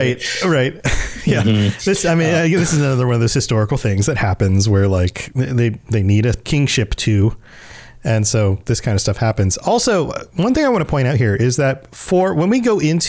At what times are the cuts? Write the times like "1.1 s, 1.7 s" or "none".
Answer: 6.4 s